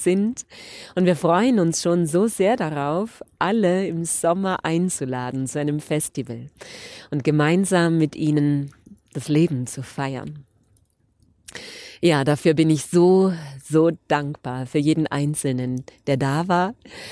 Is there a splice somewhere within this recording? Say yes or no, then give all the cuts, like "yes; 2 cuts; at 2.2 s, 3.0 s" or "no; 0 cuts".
no; 0 cuts